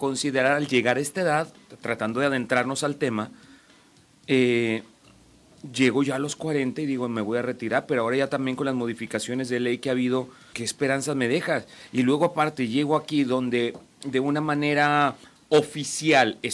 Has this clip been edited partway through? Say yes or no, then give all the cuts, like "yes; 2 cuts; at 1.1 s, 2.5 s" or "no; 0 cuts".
yes; 1 cut; at 10.5 s